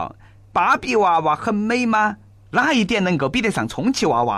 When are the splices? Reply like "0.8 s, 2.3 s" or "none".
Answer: none

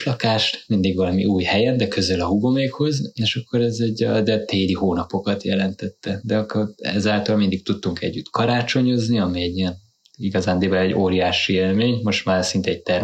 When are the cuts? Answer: none

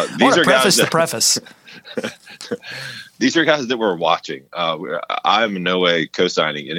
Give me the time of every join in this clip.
none

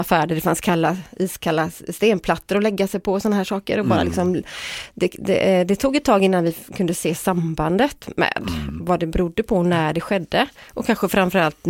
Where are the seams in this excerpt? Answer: none

